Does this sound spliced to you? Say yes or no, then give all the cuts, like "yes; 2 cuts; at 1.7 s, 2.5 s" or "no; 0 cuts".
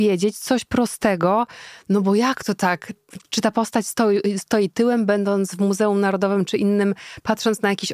no; 0 cuts